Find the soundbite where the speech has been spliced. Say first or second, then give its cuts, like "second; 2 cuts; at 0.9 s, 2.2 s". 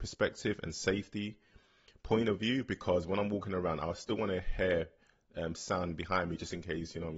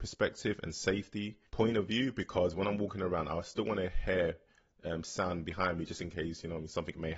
second; 1 cut; at 1.5 s